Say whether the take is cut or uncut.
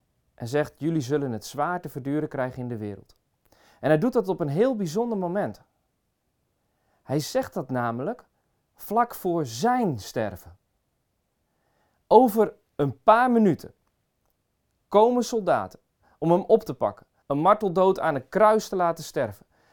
cut